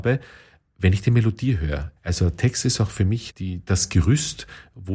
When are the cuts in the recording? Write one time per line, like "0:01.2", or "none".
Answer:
0:02.0
0:03.3